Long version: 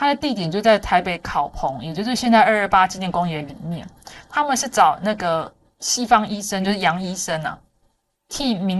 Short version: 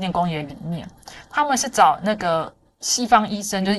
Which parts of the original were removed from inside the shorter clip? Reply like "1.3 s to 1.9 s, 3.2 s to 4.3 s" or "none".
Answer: none